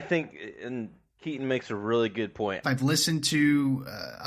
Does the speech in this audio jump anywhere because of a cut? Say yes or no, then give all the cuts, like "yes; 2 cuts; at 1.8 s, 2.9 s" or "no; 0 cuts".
yes; 1 cut; at 2.6 s